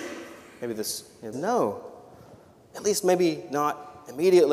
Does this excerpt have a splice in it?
yes; 1 cut; at 1.3 s

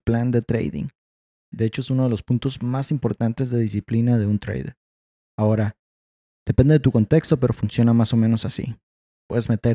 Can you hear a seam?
yes; 1 cut; at 1.5 s

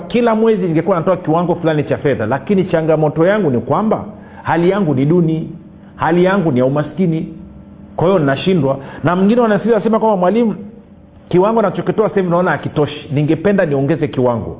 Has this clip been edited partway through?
no; 0 cuts

